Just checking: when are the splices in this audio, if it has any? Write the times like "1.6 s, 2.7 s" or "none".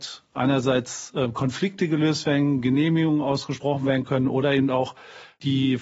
none